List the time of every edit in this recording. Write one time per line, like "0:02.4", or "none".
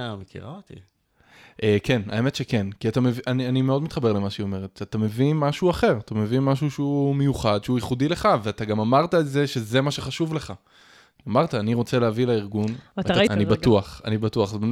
0:13.3